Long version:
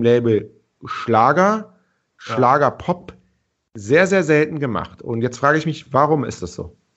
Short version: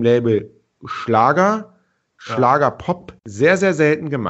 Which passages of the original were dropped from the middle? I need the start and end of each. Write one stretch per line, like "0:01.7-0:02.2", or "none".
0:03.2-0:03.7